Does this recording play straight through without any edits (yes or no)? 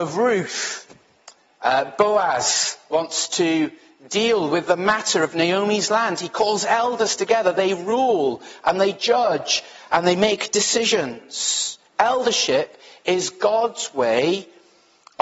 yes